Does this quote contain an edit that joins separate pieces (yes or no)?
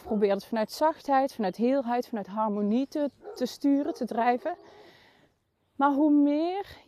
no